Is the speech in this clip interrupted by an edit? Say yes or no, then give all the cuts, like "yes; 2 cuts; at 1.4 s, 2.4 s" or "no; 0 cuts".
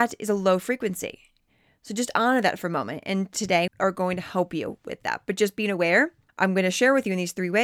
yes; 2 cuts; at 3.7 s, 6.3 s